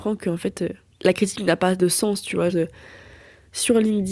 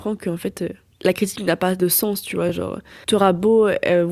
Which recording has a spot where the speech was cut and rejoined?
first; 1 cut; at 2.5 s

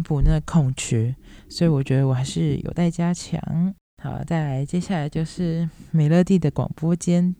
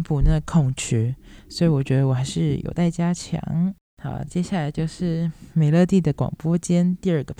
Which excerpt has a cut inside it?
second; 1 cut; at 4.3 s

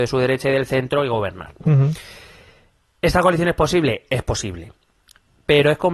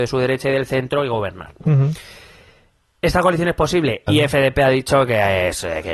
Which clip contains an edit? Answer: second; 1 cut; at 4.1 s

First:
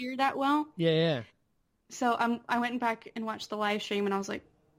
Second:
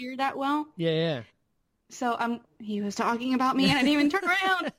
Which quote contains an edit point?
second; 1 cut; at 2.4 s

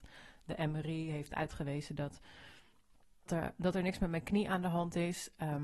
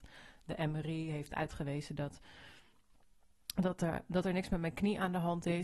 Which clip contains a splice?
first; 1 cut; at 3.3 s

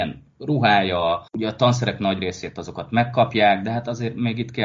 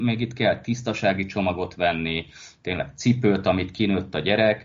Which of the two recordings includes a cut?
first; 1 cut; at 1.3 s

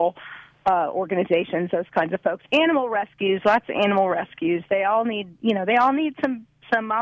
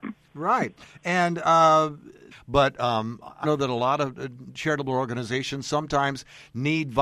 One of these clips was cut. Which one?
second; 2 cuts; at 2.3 s, 3.4 s

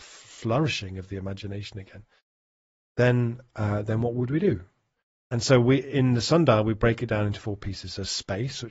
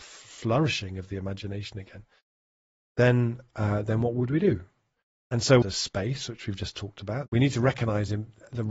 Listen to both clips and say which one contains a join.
second; 2 cuts; at 5.6 s, 7.3 s

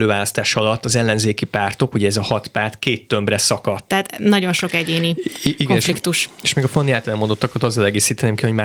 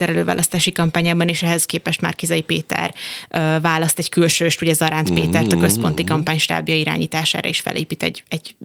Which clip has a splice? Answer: first; 1 cut; at 3.9 s

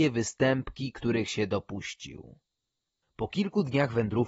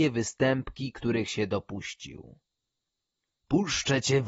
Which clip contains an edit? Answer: first; 1 cut; at 3.0 s

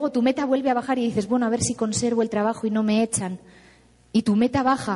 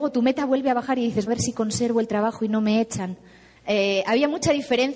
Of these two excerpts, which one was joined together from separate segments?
second; 2 cuts; at 1.3 s, 3.6 s

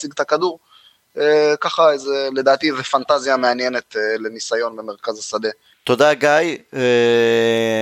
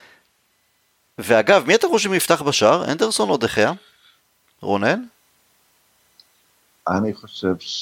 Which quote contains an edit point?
first; 1 cut; at 5.7 s

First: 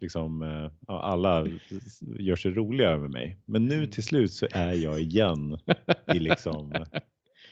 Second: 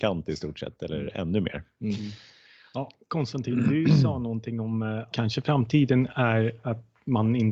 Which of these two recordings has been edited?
second; 1 cut; at 5.1 s

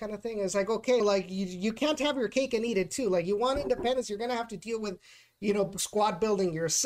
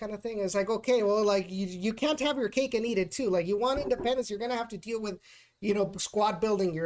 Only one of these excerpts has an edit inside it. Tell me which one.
first; 1 cut; at 1.0 s

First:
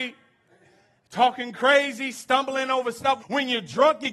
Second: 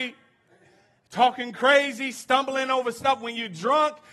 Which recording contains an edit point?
first; 1 cut; at 3.2 s

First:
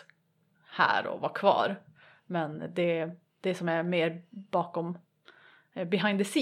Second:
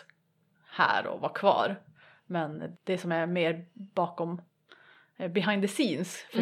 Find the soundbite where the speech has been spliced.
second; 1 cut; at 2.7 s

